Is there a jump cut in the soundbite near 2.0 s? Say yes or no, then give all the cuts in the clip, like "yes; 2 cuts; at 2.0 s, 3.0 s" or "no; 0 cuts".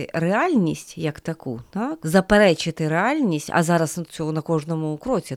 yes; 2 cuts; at 2.0 s, 4.1 s